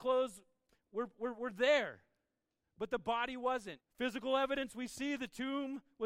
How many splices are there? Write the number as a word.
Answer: one